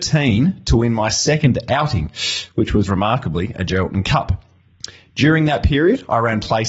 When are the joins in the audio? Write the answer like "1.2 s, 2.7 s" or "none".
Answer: none